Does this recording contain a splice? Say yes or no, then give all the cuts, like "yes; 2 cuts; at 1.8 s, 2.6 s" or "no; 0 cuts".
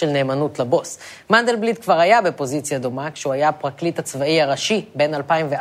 no; 0 cuts